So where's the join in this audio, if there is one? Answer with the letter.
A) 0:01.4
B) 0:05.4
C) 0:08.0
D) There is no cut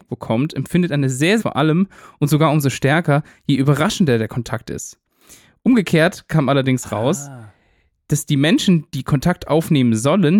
A